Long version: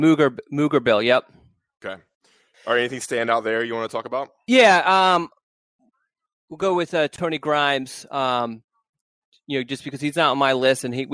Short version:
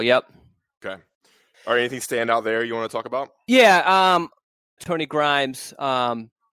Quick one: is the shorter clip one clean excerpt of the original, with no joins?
no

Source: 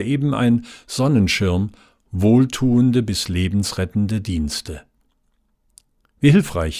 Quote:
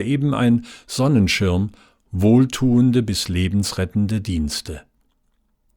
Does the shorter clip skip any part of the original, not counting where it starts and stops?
no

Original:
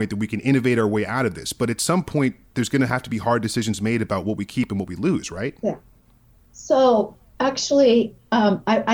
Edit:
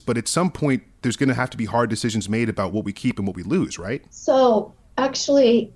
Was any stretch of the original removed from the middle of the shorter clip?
yes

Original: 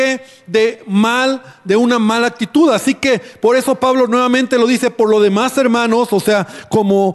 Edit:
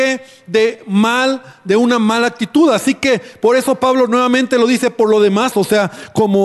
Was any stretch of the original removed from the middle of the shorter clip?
yes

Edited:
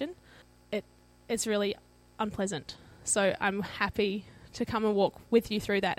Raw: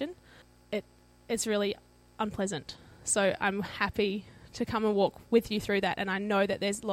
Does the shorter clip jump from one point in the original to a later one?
no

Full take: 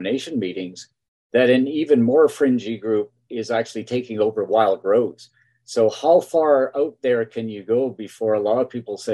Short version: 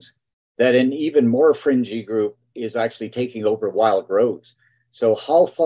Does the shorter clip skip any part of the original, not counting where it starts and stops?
no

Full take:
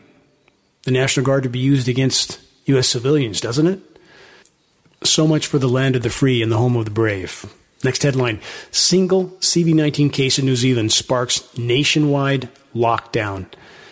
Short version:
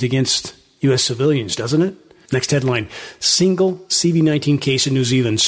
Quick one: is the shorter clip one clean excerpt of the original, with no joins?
no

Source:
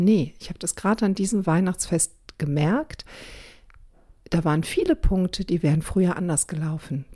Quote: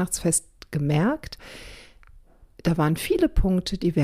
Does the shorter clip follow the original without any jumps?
yes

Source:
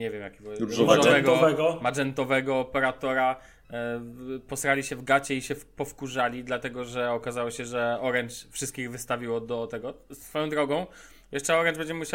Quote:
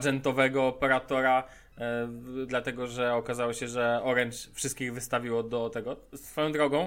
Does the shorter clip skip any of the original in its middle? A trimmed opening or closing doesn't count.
yes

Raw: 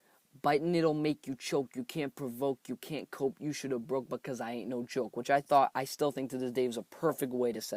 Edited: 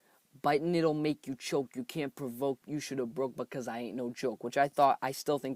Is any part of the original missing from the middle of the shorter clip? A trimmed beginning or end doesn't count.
yes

